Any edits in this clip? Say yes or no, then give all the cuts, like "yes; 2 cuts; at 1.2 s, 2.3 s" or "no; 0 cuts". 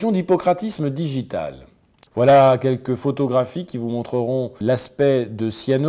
yes; 2 cuts; at 2.1 s, 4.6 s